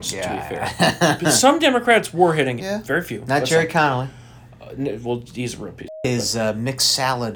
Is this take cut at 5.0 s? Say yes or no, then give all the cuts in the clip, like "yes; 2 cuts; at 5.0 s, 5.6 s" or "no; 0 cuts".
no; 1 cut; at 2.6 s